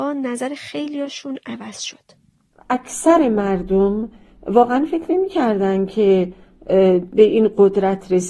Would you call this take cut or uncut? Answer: uncut